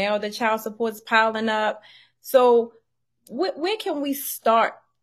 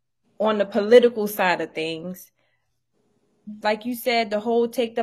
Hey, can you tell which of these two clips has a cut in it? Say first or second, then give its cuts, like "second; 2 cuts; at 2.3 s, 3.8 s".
second; 1 cut; at 3.6 s